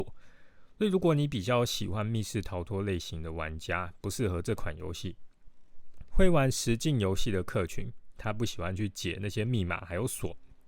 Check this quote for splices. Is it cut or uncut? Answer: cut